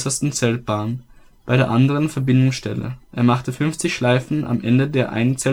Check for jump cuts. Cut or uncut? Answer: uncut